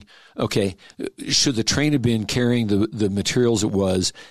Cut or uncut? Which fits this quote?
uncut